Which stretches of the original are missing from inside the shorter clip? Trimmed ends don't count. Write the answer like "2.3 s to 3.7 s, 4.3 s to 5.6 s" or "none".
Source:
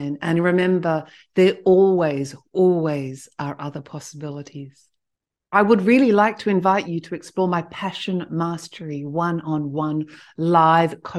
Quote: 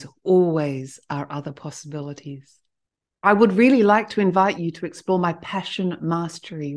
none

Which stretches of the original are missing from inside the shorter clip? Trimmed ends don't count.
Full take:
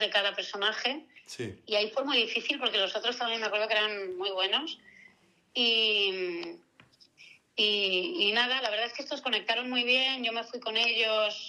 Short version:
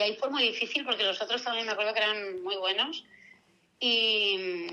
none

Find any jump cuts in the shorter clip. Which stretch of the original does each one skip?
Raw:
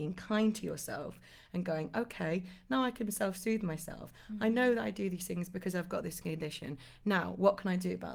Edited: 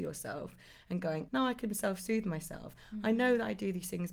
1.9 s to 2.6 s

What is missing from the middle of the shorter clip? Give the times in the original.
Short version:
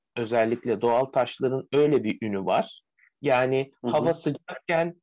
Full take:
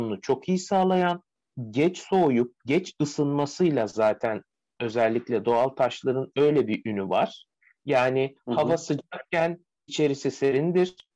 none

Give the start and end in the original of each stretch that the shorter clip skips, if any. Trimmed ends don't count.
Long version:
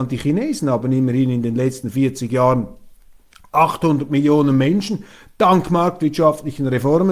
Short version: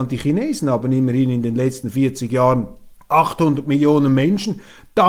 3.0 s to 3.4 s

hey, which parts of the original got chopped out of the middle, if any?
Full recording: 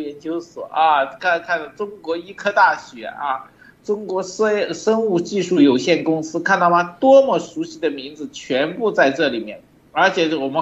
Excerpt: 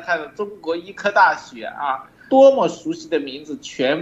3.7 s to 7.0 s

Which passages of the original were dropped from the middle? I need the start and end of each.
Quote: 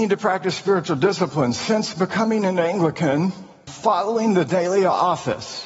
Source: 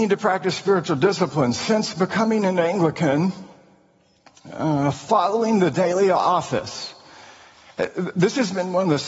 3.7 s to 4.9 s

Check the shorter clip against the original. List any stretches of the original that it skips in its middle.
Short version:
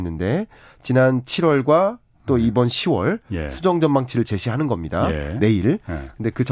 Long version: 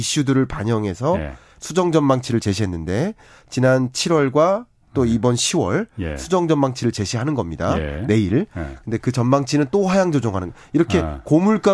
none

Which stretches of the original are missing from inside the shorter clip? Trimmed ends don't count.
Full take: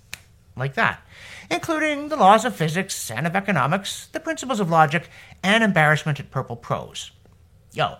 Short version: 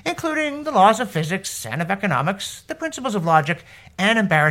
none

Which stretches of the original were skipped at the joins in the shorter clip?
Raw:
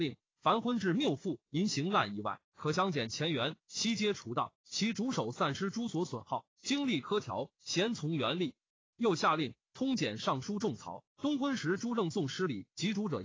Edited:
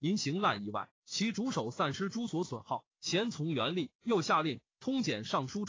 2.5 s to 4.6 s, 6.5 s to 7.5 s, 8.6 s to 8.9 s

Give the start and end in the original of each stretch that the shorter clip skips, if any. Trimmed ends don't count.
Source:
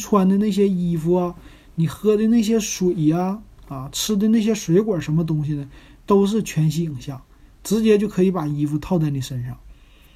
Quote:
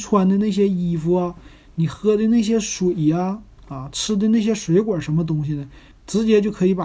5.9 s to 7.5 s

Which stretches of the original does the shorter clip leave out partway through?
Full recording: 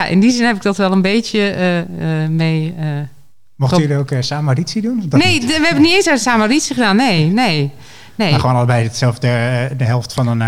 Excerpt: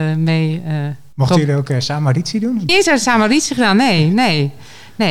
3.2 s to 3.5 s, 5.1 s to 5.9 s

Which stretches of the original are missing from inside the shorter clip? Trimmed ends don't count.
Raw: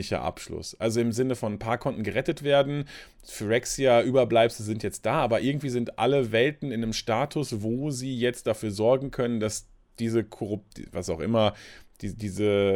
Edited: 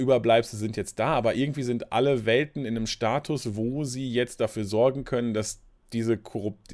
none

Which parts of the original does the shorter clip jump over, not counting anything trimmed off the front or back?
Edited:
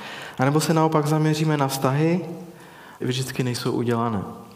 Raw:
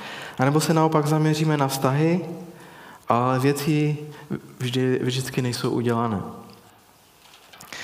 3.0 s to 5.0 s

